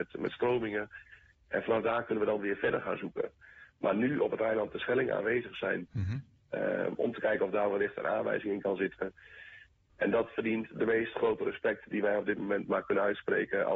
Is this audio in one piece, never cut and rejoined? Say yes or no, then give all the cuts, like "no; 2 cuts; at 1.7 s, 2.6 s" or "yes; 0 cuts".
no; 2 cuts; at 5.9 s, 9.9 s